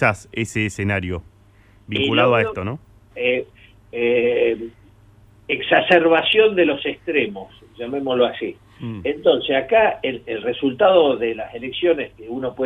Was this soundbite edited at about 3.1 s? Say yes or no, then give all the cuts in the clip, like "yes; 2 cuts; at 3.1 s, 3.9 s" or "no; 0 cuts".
yes; 2 cuts; at 3.1 s, 10.2 s